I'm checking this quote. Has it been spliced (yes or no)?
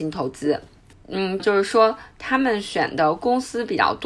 yes